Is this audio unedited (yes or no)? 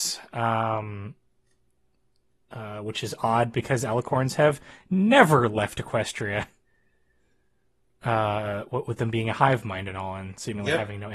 yes